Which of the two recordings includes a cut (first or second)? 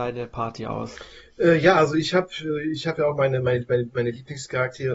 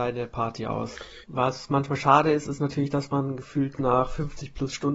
second